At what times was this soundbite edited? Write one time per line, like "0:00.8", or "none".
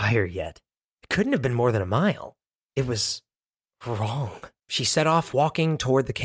0:02.6
0:04.6